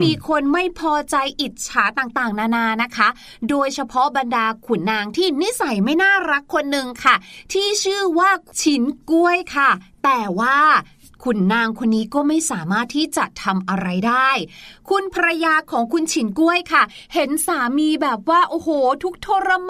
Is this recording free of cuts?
no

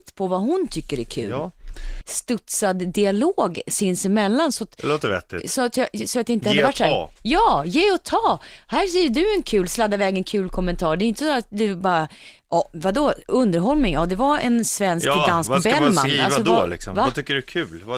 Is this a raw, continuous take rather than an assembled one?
no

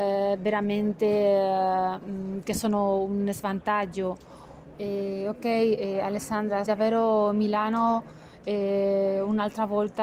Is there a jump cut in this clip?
yes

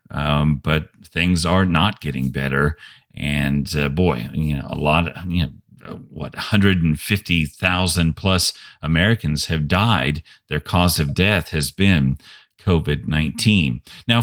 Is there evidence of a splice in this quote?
no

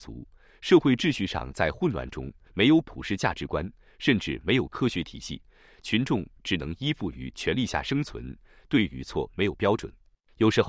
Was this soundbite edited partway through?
yes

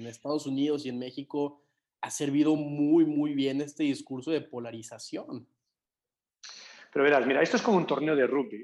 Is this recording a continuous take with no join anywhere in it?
yes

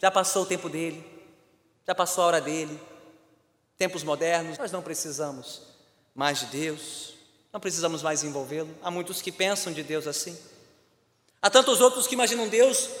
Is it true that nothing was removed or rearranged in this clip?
no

